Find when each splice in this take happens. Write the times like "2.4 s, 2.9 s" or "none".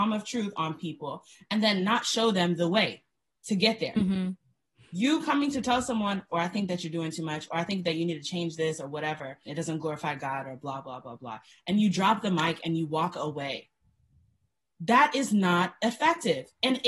6.3 s, 9.5 s